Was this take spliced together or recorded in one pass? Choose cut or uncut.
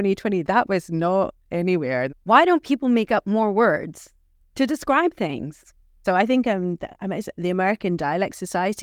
cut